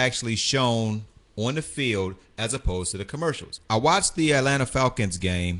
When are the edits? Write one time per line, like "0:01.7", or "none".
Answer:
0:03.6